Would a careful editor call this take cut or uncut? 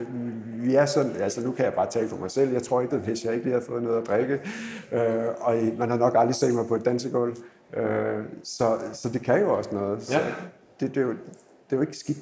cut